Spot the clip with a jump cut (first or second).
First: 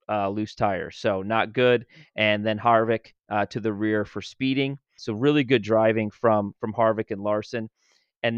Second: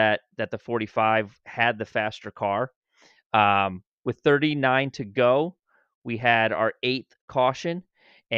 first